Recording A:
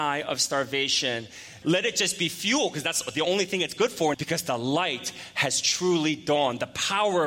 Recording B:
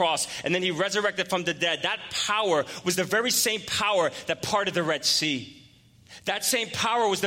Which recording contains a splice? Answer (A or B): A